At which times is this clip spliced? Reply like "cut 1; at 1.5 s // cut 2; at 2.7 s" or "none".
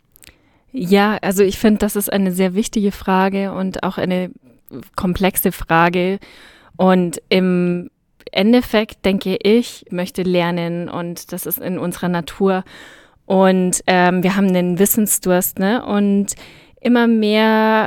cut 1; at 9.9 s

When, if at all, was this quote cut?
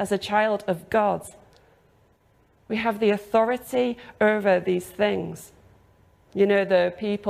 cut 1; at 6.3 s

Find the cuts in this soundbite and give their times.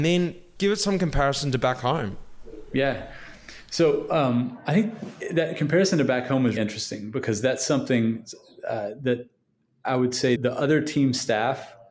cut 1; at 6.6 s // cut 2; at 10.4 s

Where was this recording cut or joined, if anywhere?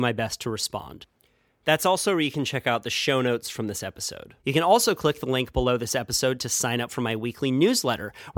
cut 1; at 4.4 s

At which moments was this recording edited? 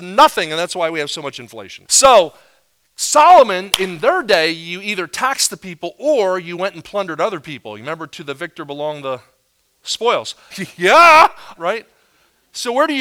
cut 1; at 1.8 s // cut 2; at 10.5 s // cut 3; at 11.5 s

